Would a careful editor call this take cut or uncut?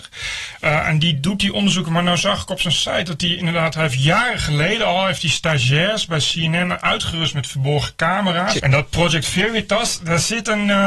cut